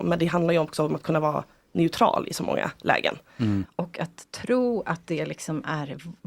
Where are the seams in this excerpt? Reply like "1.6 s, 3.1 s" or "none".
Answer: 3.6 s